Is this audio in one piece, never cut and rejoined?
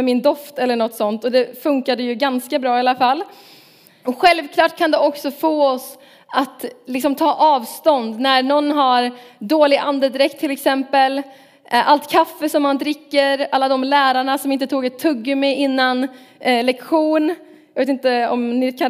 no; 1 cut; at 4.0 s

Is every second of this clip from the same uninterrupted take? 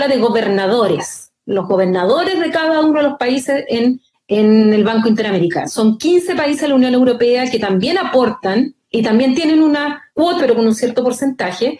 no; 2 cuts; at 5.7 s, 10.4 s

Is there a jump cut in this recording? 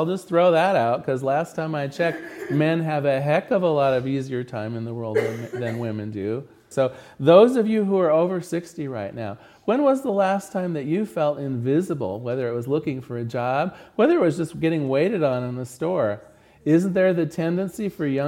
yes; 1 cut; at 6.7 s

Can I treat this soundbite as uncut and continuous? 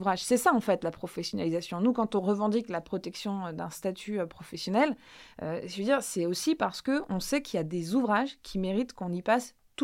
yes; 0 cuts

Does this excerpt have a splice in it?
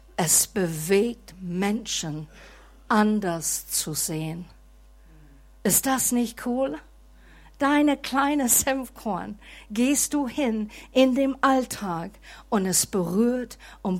no; 0 cuts

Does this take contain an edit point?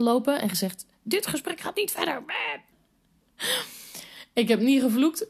yes; 1 cut; at 2.7 s

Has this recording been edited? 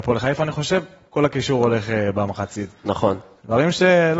no; 0 cuts

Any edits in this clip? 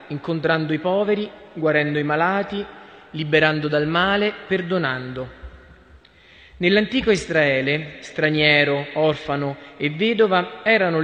no; 0 cuts

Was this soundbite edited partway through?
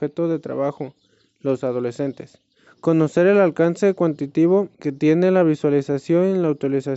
yes; 2 cuts; at 2.7 s, 4.7 s

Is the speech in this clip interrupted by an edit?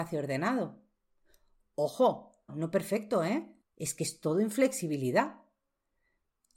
yes; 2 cuts; at 2.5 s, 3.6 s

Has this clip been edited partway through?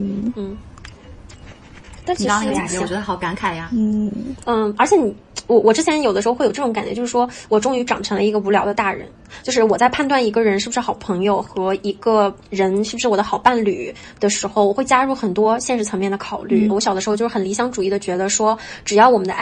yes; 1 cut; at 16.7 s

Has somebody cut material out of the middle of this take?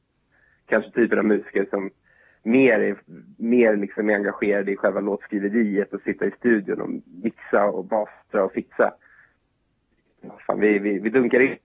no; 0 cuts

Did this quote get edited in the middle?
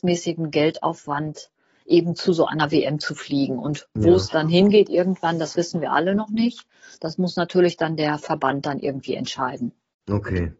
no; 0 cuts

